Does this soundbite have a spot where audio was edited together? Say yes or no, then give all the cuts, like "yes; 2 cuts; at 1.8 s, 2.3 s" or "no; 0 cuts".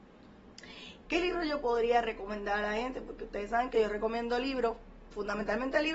yes; 1 cut; at 1.1 s